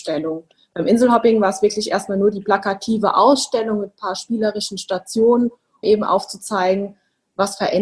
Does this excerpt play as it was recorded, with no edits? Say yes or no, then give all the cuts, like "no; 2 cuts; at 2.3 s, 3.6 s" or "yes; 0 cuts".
no; 1 cut; at 5.8 s